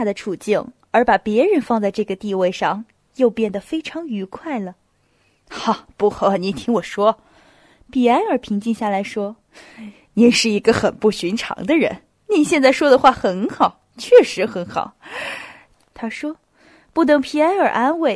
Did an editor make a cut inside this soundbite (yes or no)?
yes